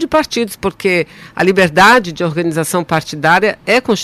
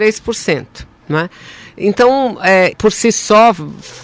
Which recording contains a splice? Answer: second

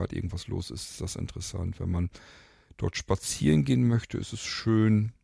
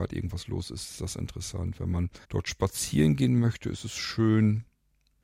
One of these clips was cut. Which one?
second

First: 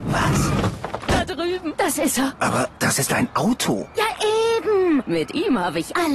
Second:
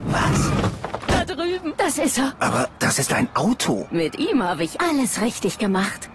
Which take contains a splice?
second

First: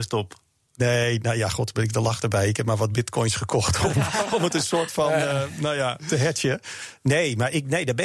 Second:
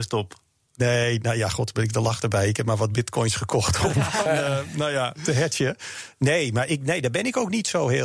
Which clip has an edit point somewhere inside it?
second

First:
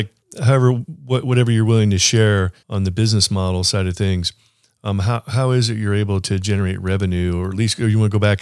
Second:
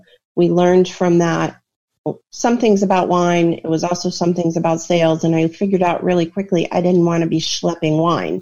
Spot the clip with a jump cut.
first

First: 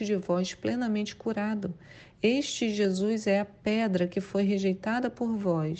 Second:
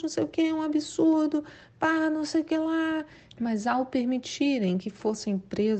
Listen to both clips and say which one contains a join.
second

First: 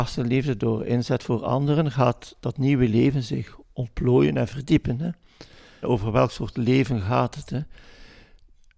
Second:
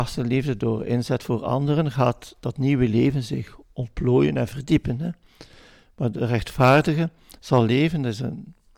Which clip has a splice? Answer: first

